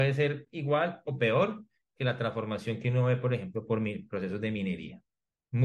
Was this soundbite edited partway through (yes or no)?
no